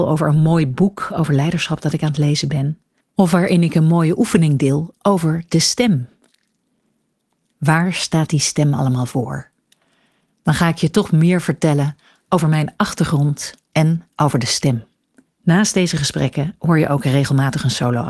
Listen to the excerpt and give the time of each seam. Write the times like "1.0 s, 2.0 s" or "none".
7.4 s, 15.3 s